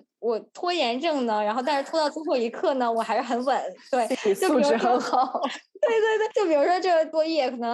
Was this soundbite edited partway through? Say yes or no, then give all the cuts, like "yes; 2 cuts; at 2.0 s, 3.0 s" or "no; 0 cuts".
no; 0 cuts